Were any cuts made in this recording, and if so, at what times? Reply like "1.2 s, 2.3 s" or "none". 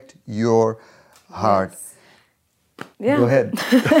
2.9 s